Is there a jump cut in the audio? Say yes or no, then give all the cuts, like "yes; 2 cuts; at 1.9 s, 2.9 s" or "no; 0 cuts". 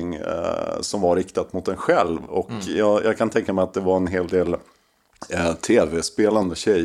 no; 0 cuts